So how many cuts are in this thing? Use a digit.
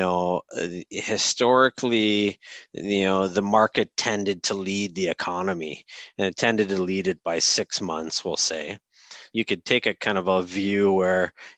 1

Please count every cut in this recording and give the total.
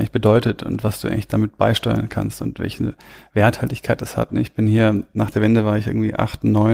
1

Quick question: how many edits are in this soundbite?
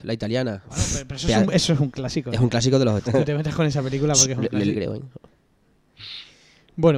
2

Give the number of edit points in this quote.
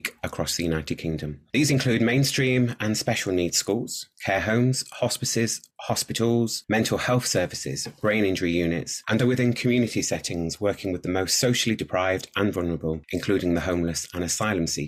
1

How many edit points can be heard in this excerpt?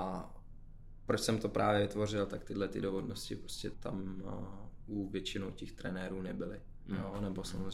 1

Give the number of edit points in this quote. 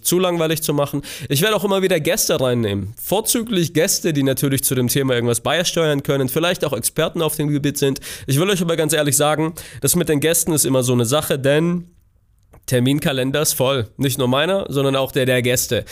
0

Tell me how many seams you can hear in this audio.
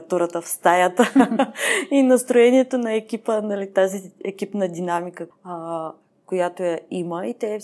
1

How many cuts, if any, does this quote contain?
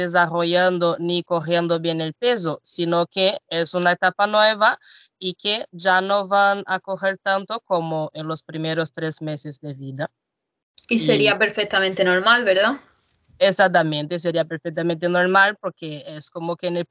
0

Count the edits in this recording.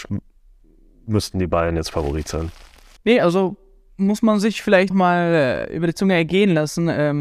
2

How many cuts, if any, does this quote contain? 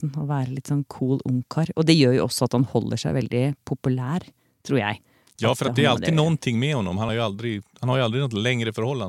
0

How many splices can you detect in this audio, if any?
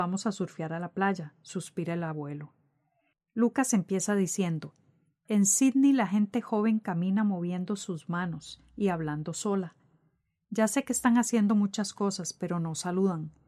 1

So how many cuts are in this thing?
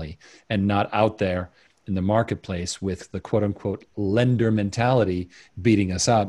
0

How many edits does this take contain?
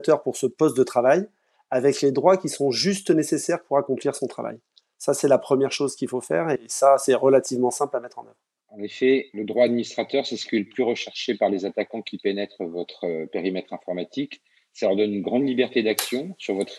0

